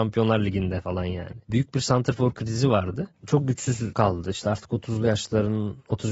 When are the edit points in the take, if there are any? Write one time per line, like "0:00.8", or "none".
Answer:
0:03.1